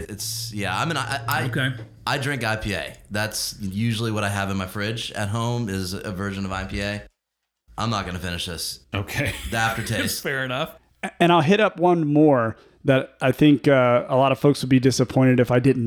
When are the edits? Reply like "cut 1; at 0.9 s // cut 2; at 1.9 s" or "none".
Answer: none